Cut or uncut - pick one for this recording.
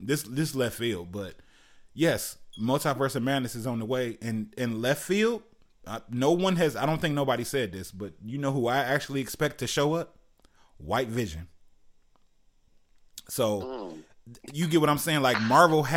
uncut